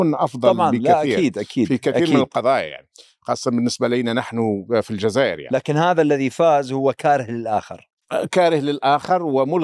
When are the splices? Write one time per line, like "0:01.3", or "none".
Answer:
none